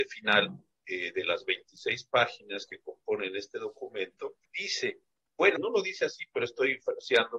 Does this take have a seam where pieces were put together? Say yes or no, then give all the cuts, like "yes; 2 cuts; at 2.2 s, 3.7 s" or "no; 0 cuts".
yes; 2 cuts; at 4.4 s, 5.6 s